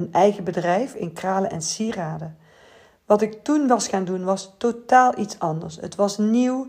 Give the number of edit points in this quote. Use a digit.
0